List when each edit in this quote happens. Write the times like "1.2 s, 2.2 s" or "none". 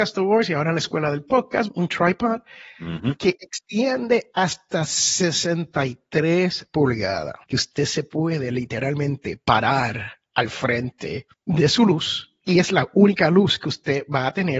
1.7 s, 7.4 s